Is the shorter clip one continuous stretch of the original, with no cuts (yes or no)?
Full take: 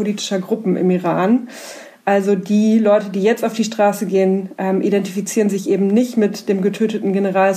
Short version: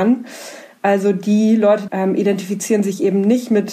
no